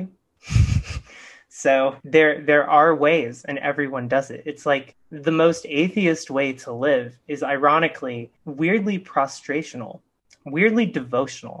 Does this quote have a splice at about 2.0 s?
yes; 1 cut; at 2.0 s

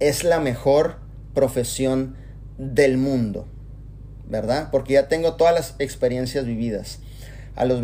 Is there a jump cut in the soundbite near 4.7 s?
no; 0 cuts

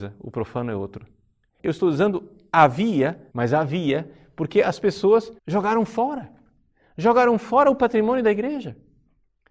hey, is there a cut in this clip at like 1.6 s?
yes; 3 cuts; at 1.6 s, 3.3 s, 5.4 s

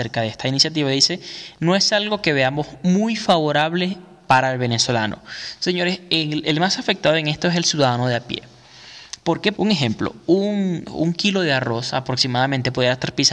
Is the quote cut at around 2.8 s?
no; 1 cut; at 9.5 s

